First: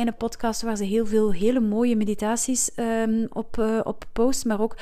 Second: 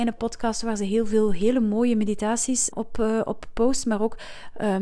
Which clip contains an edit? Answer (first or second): second